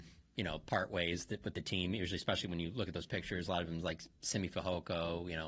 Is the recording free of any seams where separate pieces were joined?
yes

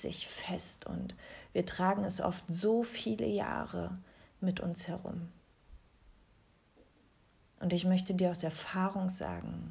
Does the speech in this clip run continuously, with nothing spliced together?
yes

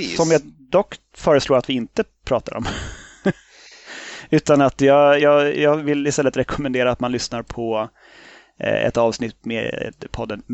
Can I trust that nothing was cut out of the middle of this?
yes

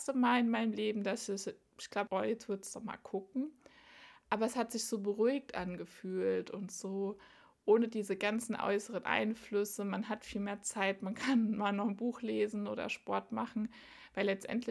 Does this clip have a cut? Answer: yes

